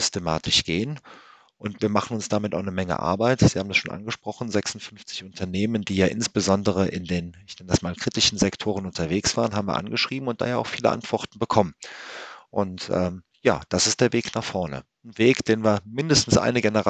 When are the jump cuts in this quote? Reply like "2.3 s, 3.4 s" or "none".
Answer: none